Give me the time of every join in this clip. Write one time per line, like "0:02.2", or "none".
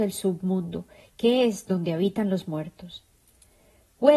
none